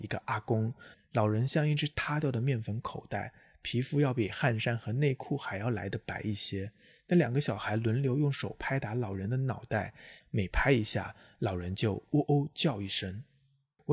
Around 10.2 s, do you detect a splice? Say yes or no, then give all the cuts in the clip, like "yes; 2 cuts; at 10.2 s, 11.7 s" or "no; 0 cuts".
yes; 2 cuts; at 0.9 s, 10.2 s